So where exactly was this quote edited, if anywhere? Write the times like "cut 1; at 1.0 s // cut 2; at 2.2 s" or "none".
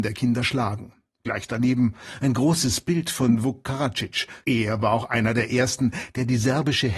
cut 1; at 4.4 s